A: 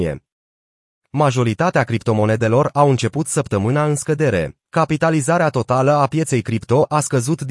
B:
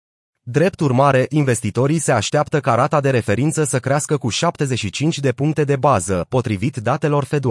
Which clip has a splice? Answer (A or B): A